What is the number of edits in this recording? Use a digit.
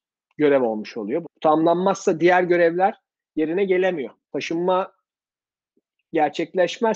2